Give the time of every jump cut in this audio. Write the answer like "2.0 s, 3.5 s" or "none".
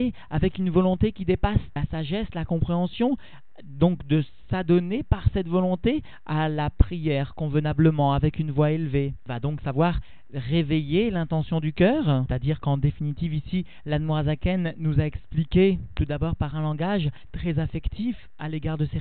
12.3 s

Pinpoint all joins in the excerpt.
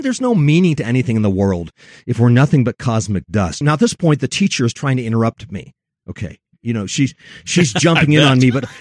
3.6 s

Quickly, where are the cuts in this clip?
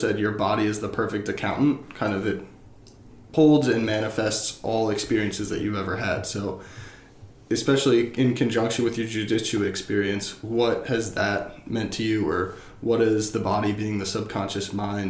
none

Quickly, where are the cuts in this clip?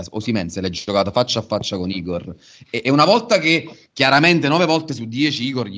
none

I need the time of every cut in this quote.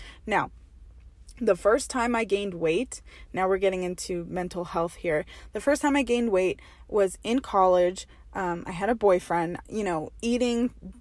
9.6 s

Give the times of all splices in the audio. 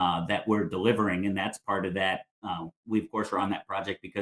none

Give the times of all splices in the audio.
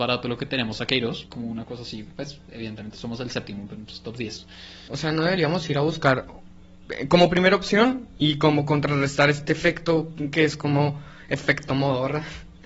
1.3 s, 4.9 s

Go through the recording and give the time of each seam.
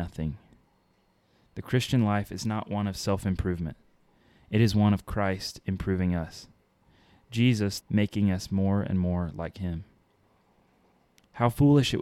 7.8 s

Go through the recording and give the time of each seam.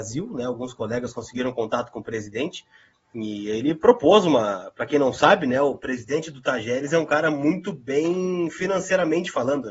none

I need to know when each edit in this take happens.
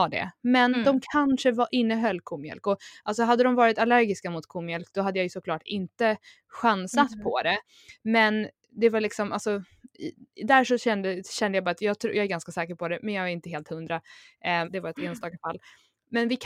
14.6 s

